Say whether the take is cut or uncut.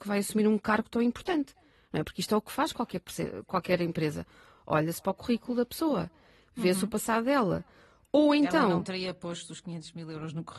uncut